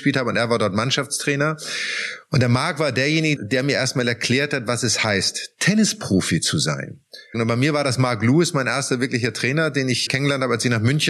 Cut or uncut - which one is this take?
cut